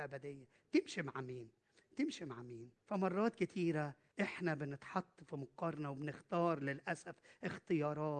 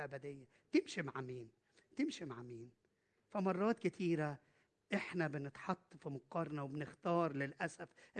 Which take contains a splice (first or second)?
first